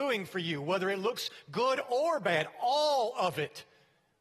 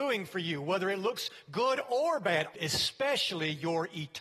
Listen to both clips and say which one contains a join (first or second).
second